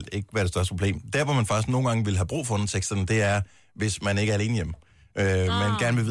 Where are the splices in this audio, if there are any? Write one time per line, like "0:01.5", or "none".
none

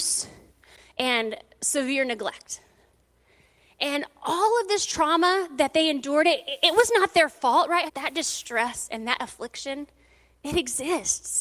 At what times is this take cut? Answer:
0:07.9

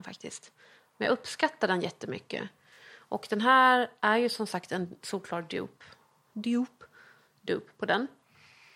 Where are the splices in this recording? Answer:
none

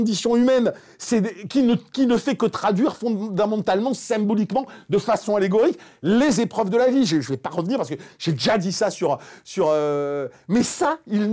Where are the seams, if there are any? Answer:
none

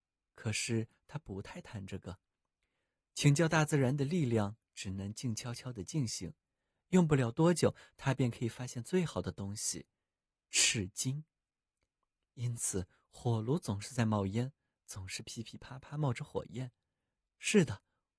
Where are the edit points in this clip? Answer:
none

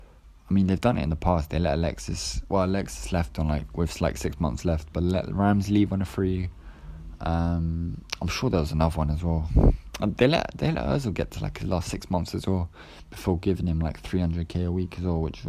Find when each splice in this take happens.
none

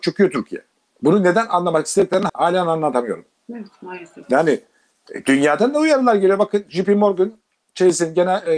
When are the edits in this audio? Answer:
0:02.3

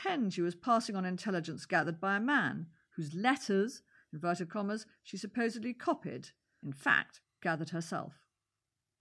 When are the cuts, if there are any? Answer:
0:06.6

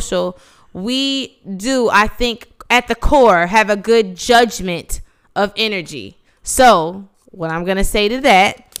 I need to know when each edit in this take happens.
none

